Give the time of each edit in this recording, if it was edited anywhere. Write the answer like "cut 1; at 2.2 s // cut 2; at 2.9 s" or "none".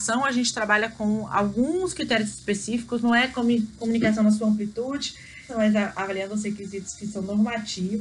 cut 1; at 5.5 s